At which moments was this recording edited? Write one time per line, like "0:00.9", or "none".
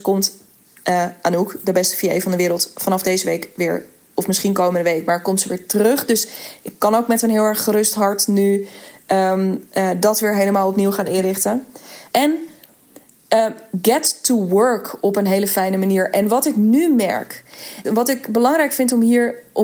0:12.1
0:17.8